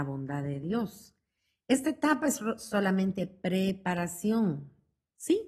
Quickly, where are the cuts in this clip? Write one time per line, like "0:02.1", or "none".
none